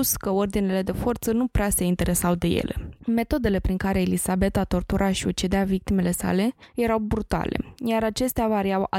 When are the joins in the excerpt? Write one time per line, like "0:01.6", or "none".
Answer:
0:03.0